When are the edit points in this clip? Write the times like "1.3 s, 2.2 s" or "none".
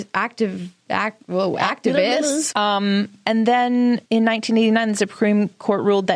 2.5 s, 4.1 s